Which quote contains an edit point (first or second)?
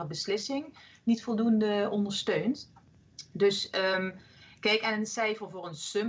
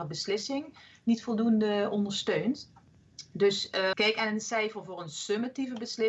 second